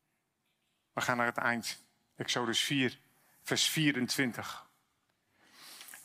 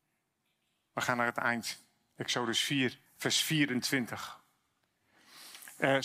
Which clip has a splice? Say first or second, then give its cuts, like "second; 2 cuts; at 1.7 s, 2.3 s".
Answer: second; 1 cut; at 3.1 s